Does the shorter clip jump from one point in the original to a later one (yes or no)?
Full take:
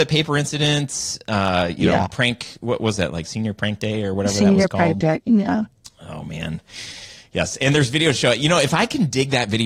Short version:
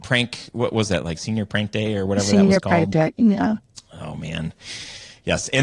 no